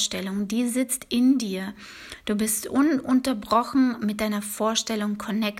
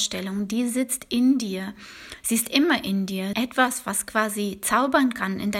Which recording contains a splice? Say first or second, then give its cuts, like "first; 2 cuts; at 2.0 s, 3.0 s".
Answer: second; 2 cuts; at 2.2 s, 3.3 s